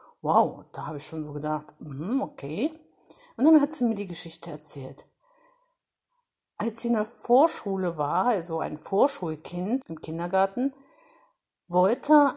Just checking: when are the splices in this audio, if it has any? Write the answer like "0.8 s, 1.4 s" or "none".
9.8 s

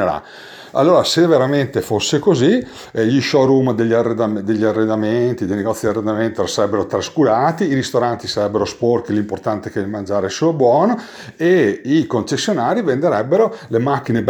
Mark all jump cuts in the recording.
none

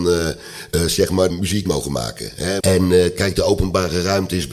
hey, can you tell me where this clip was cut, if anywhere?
1.3 s, 2.6 s

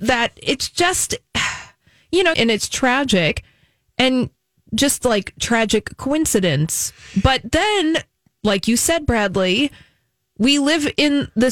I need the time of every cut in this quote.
2.3 s

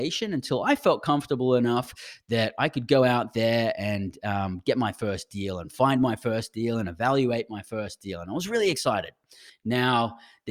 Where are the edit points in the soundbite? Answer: 9.5 s

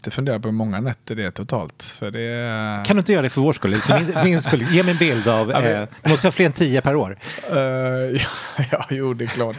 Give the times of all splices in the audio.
none

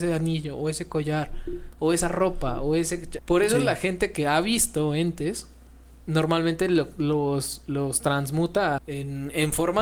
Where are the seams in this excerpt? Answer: 3.2 s, 8.8 s

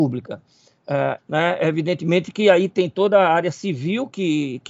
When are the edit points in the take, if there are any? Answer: 1.2 s

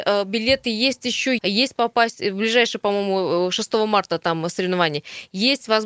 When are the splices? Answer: 1.4 s

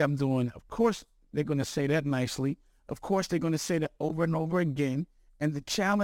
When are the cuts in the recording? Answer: none

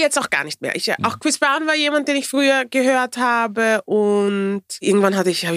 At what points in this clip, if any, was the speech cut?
none

